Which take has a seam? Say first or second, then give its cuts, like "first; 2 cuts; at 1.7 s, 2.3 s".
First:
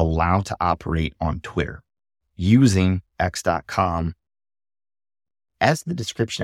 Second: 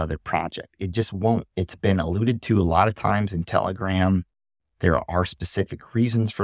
second; 1 cut; at 1.5 s